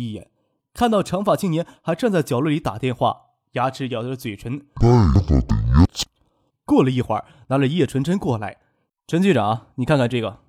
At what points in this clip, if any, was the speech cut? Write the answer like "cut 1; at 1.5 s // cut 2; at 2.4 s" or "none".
cut 1; at 6.5 s // cut 2; at 8.9 s